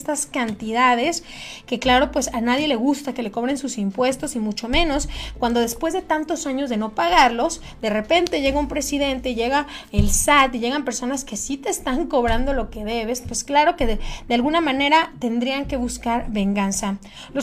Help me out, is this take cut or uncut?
uncut